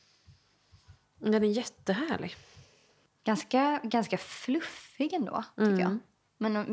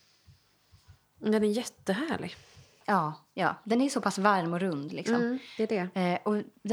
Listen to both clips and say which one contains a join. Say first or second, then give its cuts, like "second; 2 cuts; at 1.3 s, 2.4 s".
second; 1 cut; at 2.8 s